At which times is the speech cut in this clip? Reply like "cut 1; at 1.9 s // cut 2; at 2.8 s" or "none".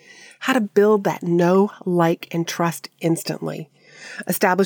none